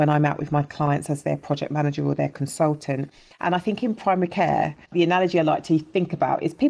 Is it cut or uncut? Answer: cut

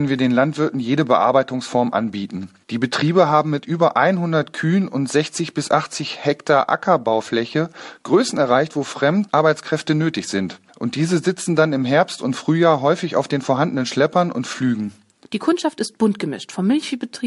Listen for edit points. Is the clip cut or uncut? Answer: cut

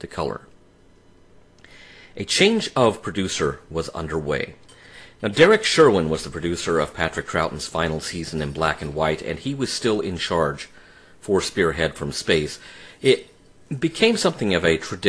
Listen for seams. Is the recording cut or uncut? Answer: uncut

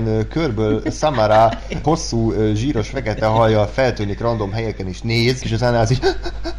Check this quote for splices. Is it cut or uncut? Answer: cut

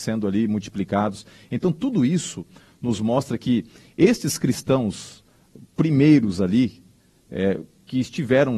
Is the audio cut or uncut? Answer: uncut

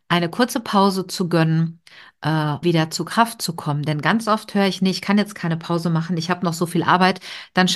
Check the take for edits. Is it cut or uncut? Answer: cut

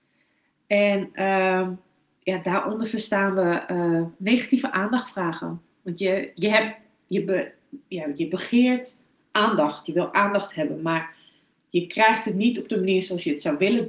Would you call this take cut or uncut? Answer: uncut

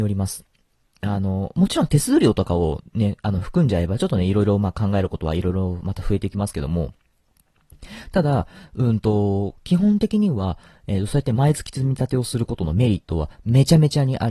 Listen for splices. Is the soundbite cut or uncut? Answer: uncut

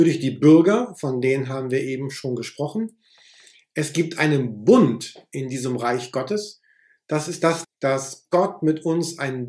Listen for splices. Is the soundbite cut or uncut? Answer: cut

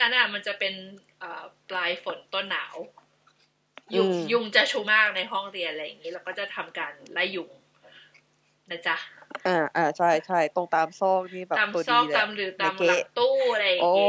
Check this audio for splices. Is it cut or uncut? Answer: cut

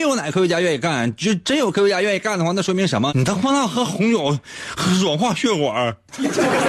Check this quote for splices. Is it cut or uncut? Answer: cut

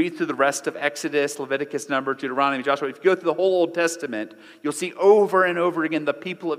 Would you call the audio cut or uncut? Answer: uncut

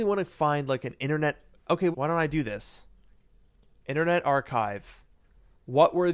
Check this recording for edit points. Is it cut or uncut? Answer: cut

